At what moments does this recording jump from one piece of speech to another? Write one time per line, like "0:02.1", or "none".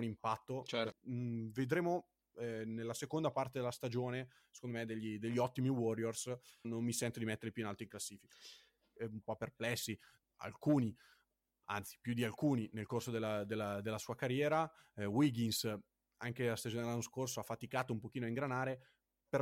0:00.9
0:06.6
0:09.0